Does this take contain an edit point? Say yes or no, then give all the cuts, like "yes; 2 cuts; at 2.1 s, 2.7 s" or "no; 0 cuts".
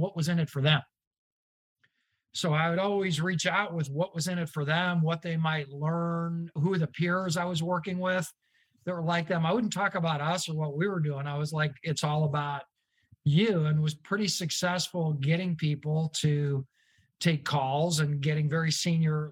no; 0 cuts